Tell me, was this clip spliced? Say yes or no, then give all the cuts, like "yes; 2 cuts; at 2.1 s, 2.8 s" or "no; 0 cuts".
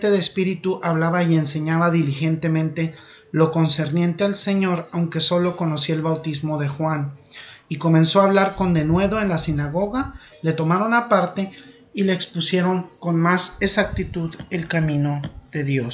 yes; 1 cut; at 10.3 s